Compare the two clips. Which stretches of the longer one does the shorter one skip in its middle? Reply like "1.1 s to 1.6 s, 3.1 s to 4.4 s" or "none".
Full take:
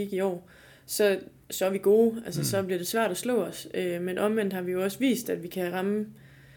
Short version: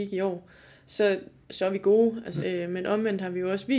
2.4 s to 3.7 s